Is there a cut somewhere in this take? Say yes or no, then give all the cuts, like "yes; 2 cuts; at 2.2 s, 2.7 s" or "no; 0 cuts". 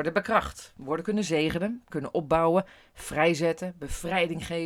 yes; 1 cut; at 1.9 s